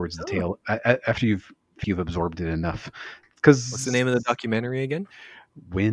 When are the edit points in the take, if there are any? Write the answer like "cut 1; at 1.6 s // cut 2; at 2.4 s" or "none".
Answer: cut 1; at 1.8 s

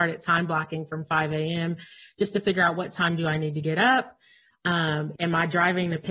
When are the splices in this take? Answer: cut 1; at 5.2 s

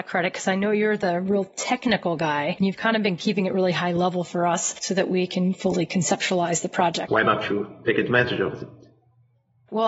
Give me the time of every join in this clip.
cut 1; at 7.1 s

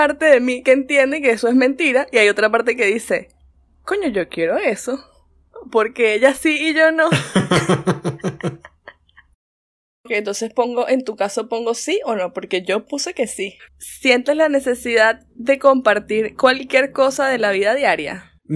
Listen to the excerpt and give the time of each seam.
cut 1; at 13.7 s

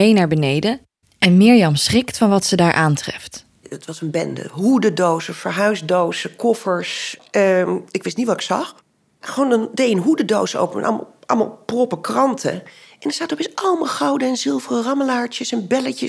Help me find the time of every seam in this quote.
none

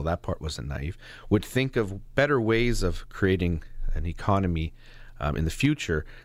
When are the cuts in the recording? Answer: none

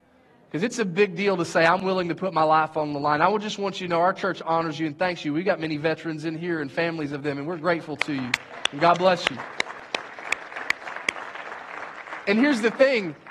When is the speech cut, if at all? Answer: none

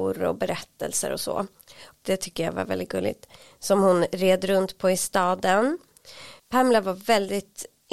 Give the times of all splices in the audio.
cut 1; at 2.0 s

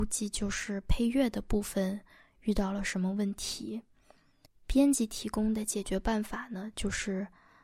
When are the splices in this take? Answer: cut 1; at 4.4 s

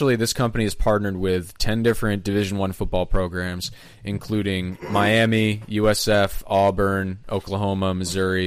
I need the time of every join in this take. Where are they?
none

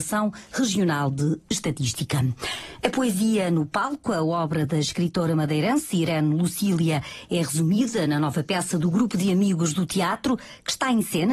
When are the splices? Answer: none

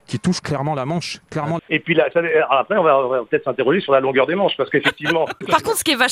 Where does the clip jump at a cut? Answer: cut 1; at 1.6 s

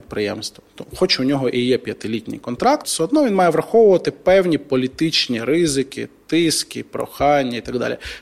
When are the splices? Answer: cut 1; at 2.8 s

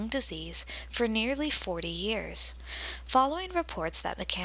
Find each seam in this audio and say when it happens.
none

